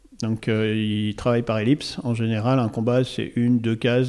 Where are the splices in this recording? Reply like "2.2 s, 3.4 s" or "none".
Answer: none